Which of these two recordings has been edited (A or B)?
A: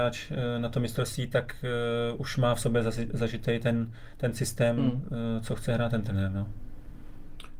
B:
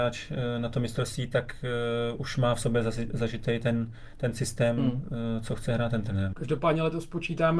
B